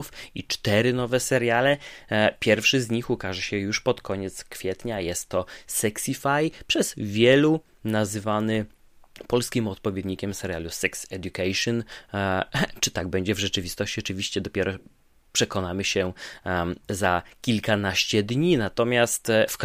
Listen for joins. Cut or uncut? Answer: uncut